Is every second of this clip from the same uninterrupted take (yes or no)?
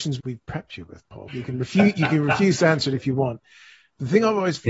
no